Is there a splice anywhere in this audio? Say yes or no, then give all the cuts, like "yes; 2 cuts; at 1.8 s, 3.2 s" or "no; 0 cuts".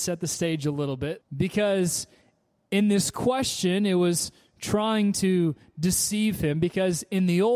yes; 1 cut; at 1.2 s